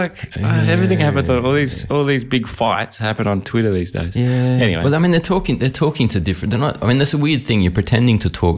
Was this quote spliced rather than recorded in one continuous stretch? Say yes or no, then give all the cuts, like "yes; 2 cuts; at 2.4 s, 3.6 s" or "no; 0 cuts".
no; 0 cuts